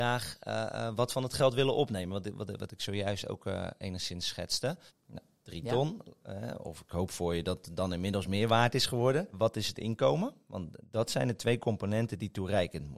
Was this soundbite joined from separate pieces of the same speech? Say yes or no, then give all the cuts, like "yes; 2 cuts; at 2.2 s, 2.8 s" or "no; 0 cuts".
yes; 1 cut; at 4.9 s